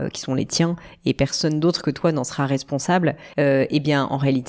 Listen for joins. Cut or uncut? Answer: cut